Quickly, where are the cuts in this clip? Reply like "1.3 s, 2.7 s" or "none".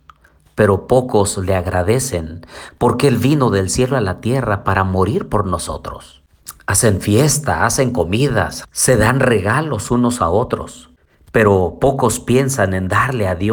8.6 s